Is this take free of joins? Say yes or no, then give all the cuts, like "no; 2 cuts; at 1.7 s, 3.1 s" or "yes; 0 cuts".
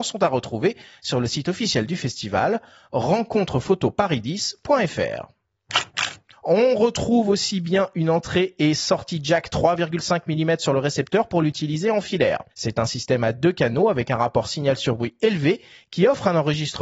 no; 2 cuts; at 6.3 s, 12.5 s